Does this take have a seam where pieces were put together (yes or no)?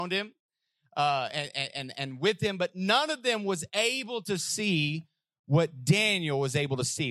no